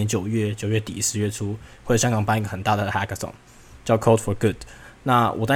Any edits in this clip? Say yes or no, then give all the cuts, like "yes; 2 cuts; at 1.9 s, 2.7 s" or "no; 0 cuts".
no; 0 cuts